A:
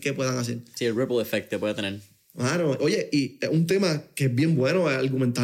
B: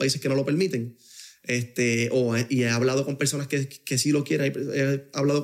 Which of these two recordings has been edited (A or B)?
A